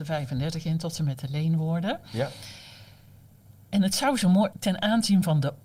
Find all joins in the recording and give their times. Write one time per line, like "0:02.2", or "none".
0:04.5